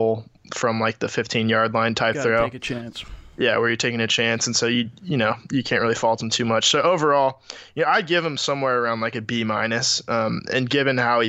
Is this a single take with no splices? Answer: yes; 0 cuts

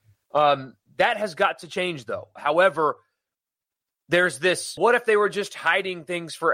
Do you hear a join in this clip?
yes; 2 cuts; at 2.4 s, 4.8 s

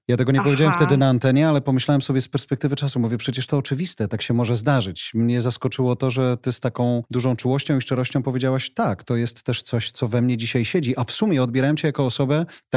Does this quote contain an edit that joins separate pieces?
no; 0 cuts

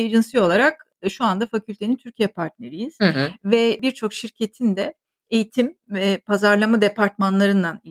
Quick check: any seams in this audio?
no; 0 cuts

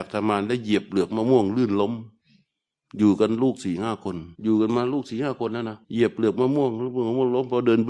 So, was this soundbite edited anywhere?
yes; 2 cuts; at 4.3 s, 5.8 s

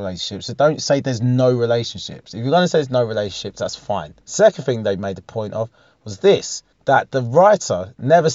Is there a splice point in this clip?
yes; 2 cuts; at 4.2 s, 6.7 s

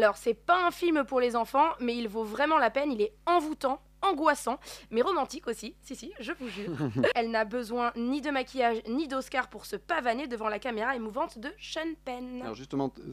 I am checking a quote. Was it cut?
yes; 1 cut; at 7.1 s

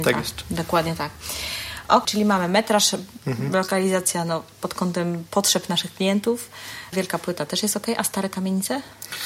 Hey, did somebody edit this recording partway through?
yes; 3 cuts; at 2.0 s, 3.2 s, 6.9 s

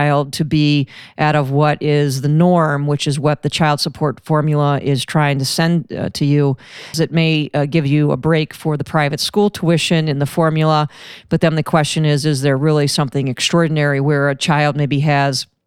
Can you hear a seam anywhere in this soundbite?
yes; 1 cut; at 6.9 s

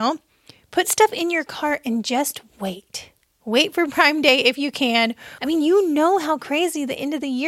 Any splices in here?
yes; 1 cut; at 5.4 s

